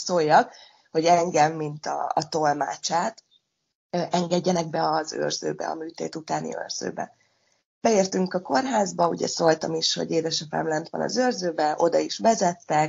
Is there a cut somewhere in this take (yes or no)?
no